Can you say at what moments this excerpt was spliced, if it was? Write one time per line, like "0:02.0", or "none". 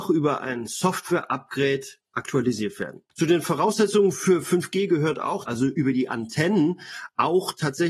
0:02.0
0:03.1
0:05.5